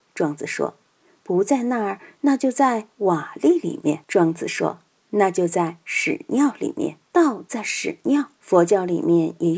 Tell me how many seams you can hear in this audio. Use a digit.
3